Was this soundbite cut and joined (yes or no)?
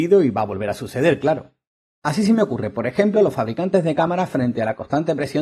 no